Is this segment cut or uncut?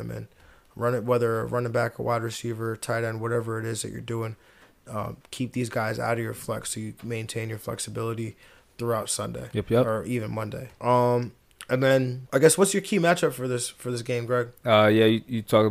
uncut